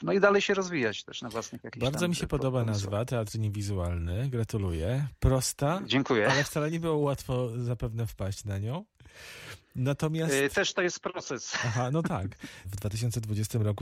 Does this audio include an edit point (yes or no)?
yes